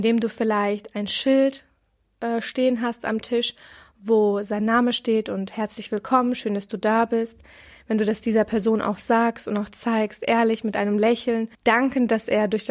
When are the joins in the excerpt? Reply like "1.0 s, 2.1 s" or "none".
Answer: 11.5 s